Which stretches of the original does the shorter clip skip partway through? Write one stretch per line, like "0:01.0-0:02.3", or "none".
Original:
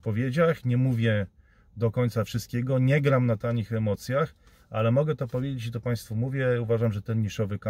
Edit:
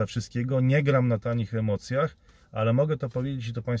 none